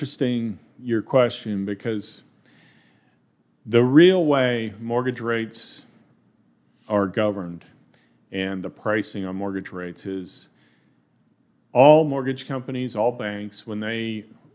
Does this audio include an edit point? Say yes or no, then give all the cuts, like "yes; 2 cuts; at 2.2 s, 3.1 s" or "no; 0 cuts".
no; 0 cuts